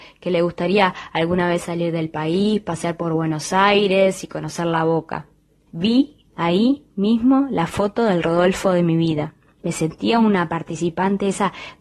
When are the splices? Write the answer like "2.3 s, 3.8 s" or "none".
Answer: 5.7 s, 9.6 s